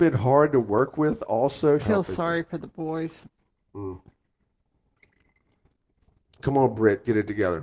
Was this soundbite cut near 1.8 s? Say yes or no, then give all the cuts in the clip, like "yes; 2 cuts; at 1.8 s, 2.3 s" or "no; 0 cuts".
yes; 1 cut; at 1.8 s